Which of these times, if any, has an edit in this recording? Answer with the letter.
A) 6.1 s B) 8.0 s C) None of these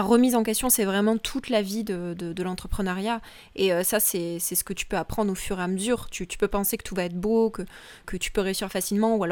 B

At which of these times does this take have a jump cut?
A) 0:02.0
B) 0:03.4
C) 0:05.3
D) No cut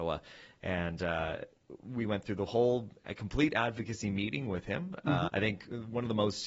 C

